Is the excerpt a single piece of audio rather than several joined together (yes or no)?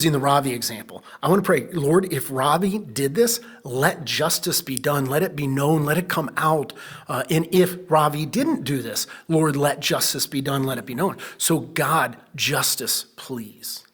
yes